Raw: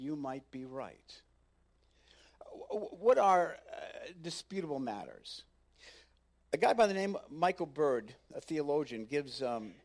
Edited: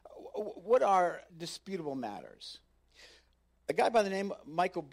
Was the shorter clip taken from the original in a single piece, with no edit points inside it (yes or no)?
no